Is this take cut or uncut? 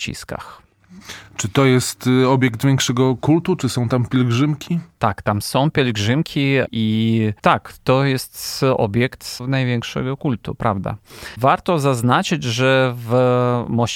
uncut